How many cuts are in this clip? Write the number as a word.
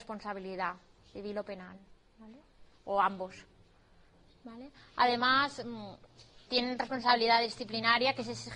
one